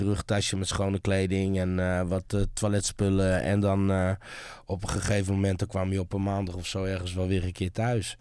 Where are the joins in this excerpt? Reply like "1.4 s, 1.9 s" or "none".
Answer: none